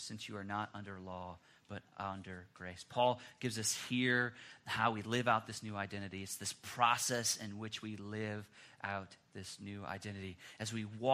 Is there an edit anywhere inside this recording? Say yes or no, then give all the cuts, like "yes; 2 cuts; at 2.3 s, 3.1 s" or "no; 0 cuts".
no; 0 cuts